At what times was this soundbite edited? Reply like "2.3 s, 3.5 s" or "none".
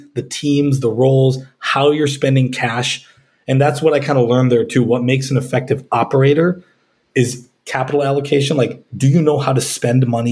none